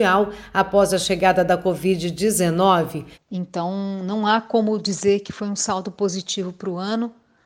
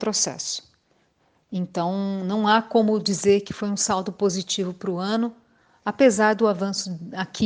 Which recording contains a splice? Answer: first; 1 cut; at 3.1 s

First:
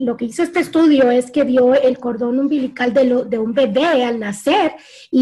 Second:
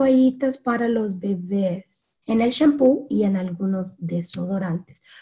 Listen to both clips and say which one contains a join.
second; 1 cut; at 2.2 s

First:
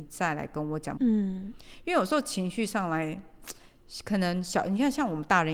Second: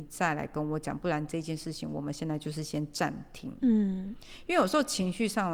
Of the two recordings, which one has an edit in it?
first; 1 cut; at 1.0 s

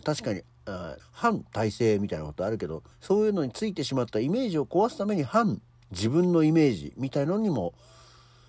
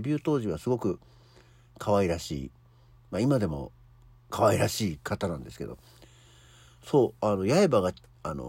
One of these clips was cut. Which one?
first; 2 cuts; at 1.0 s, 2.9 s

